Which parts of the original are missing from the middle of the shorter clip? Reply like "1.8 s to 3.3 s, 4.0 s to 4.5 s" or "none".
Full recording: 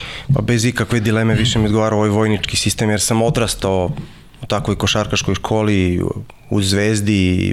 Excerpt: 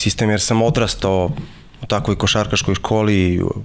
none